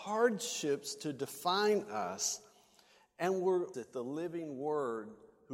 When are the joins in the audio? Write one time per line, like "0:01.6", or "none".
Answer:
0:03.7